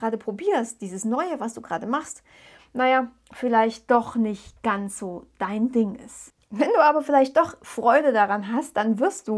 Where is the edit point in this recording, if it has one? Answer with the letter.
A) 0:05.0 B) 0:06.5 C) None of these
C